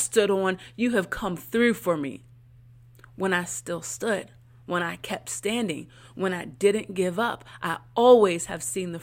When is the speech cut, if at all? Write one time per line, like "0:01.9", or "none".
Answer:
none